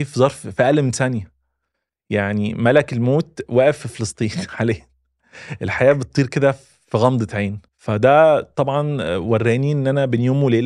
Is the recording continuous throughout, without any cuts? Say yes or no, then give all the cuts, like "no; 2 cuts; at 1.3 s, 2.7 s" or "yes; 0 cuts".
no; 1 cut; at 7.7 s